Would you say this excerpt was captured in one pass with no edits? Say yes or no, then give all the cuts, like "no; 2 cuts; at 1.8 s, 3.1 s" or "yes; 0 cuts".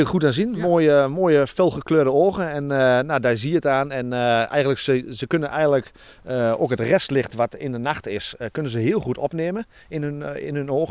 yes; 0 cuts